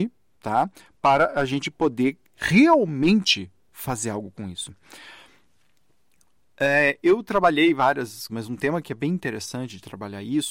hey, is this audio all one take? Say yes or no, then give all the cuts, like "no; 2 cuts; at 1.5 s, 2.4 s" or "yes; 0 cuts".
no; 1 cut; at 8.3 s